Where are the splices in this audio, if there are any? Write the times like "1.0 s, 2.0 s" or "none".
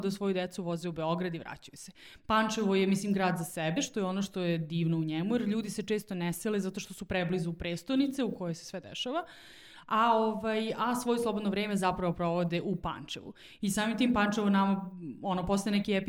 none